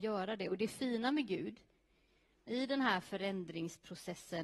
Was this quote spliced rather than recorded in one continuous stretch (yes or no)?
yes